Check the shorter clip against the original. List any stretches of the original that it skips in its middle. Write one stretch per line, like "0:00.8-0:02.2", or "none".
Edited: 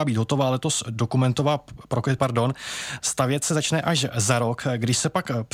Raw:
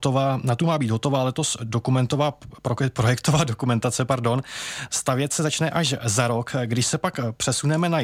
0:02.9-0:04.1